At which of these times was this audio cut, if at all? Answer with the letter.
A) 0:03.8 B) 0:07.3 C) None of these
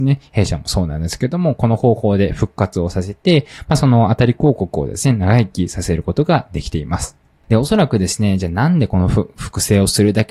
C